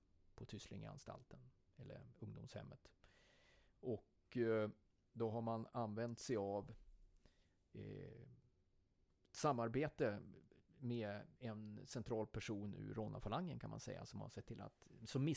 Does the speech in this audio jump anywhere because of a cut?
no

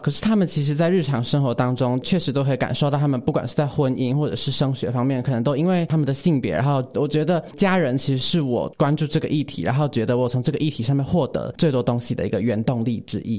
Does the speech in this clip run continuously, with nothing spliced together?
no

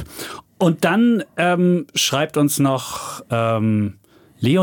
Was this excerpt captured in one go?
yes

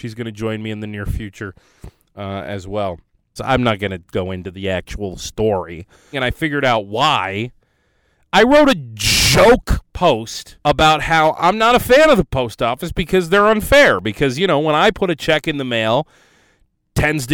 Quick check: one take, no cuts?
no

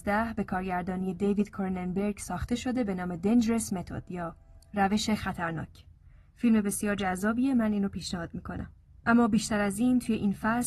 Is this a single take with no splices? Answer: yes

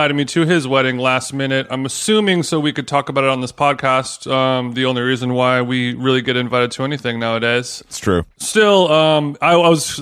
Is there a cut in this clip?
no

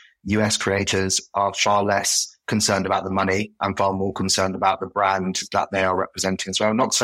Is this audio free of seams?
yes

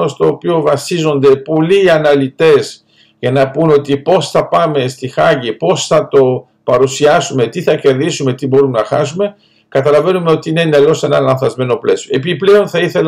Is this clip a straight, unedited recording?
yes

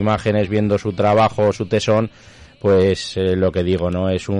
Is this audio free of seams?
yes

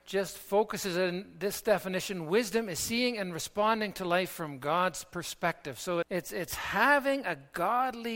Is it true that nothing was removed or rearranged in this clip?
no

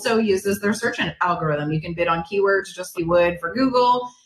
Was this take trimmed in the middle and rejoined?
yes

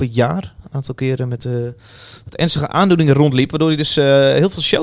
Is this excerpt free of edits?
yes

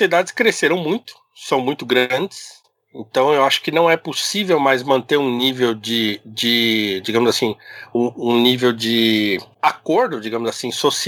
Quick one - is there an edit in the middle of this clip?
no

